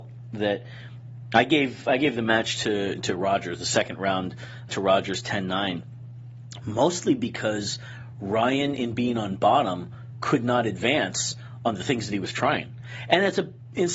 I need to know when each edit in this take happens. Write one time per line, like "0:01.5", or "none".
0:04.7